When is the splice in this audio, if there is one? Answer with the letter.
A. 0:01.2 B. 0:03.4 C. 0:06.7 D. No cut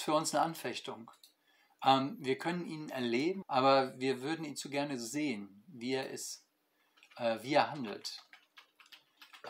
B